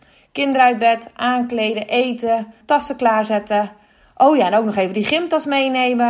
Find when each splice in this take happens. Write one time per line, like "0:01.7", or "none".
0:02.6